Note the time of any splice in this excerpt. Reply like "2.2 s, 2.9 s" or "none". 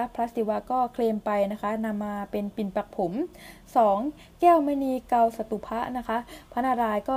none